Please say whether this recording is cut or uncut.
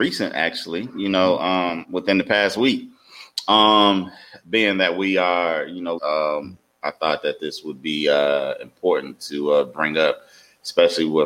cut